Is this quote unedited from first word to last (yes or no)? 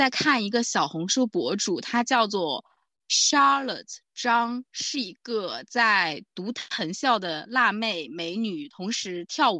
yes